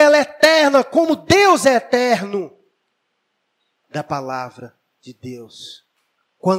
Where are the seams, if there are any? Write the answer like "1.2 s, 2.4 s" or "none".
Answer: 3.8 s